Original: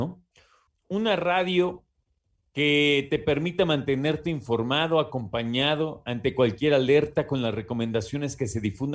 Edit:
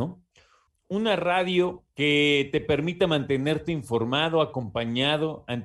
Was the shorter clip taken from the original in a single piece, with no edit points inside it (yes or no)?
no